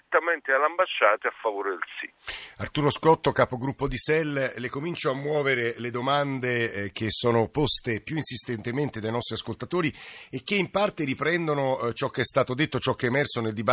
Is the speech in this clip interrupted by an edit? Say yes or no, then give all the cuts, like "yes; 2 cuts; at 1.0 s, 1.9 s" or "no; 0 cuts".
no; 0 cuts